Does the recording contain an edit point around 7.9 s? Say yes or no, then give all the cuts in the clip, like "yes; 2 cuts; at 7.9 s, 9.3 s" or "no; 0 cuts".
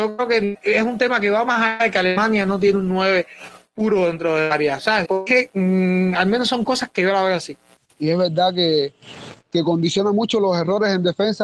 no; 1 cut; at 5.0 s